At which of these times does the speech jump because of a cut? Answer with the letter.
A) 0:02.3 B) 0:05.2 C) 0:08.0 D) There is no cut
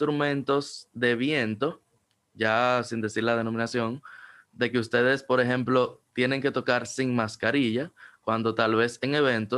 D